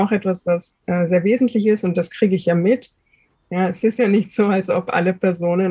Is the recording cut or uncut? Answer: cut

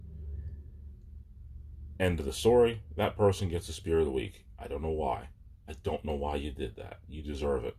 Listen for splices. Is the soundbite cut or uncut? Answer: uncut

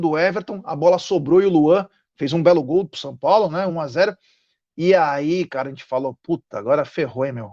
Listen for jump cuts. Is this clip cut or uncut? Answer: uncut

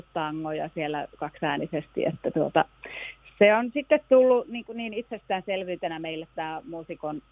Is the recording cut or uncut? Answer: uncut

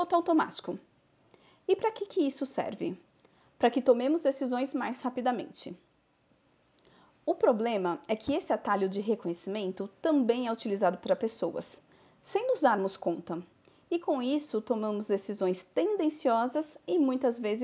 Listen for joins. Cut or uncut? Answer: uncut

